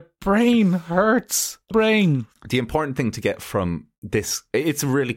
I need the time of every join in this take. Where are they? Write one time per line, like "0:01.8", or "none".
0:01.7